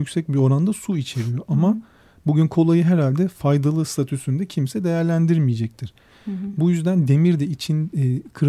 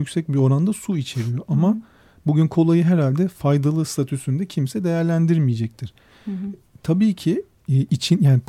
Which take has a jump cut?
second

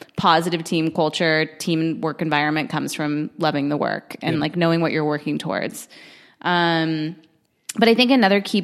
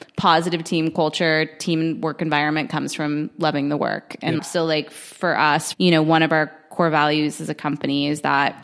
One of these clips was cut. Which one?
second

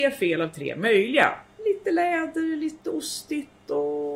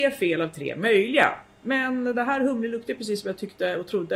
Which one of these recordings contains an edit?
first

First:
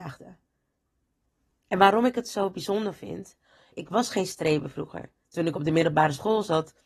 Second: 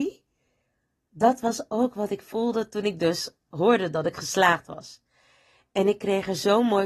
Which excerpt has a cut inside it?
first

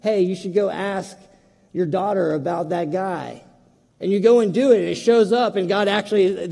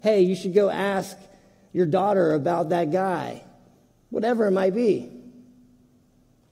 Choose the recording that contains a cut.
first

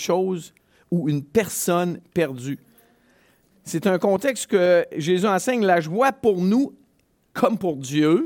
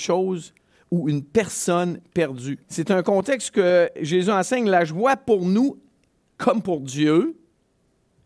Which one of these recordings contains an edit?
second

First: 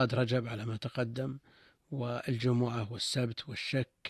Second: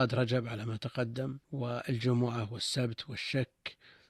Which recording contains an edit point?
second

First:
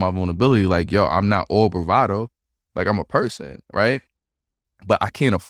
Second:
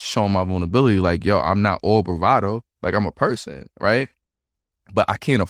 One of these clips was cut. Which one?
second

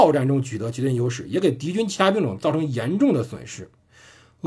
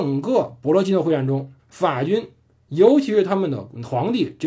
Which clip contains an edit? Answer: second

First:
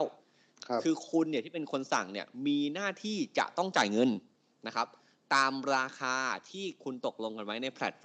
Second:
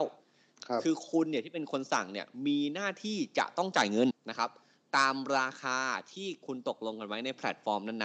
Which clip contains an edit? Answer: second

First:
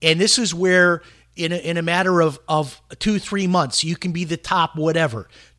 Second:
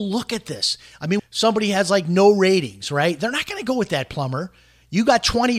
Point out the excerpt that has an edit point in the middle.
second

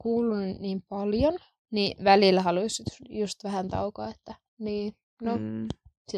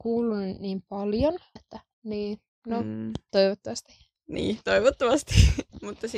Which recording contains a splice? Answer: second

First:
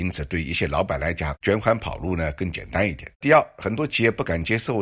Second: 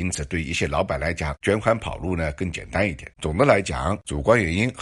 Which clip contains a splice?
second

